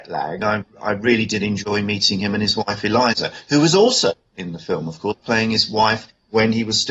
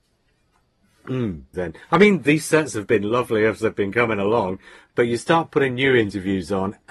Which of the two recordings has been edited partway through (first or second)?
second